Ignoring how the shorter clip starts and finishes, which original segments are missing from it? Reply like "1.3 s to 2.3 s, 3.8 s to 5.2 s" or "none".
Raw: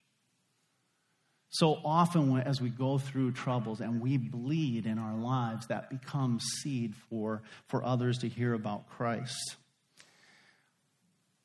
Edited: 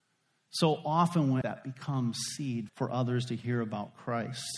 2.4 s to 5.7 s, 6.9 s to 7.6 s